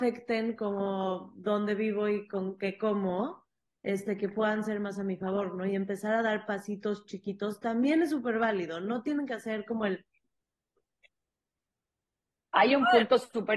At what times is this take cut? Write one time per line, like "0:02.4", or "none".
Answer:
none